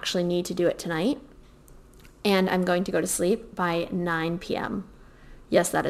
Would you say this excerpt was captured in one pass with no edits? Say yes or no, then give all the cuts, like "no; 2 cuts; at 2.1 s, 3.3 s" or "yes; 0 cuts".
yes; 0 cuts